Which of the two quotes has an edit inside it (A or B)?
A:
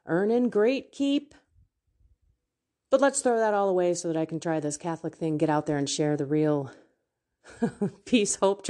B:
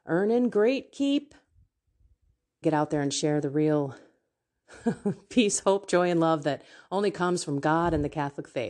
B